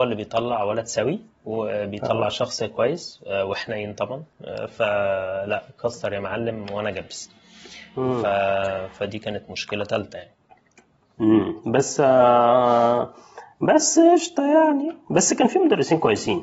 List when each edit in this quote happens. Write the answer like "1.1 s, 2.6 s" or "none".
none